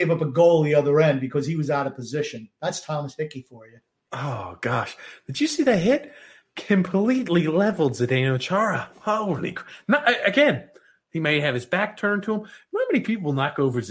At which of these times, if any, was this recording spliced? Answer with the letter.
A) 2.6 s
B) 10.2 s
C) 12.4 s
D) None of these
D